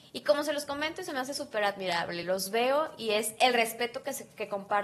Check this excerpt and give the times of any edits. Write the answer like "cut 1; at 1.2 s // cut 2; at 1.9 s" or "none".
none